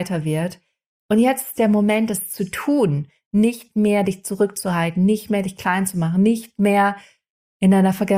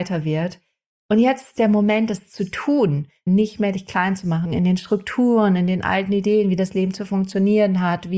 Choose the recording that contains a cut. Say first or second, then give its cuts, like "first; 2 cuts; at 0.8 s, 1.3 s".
second; 2 cuts; at 3.3 s, 4.4 s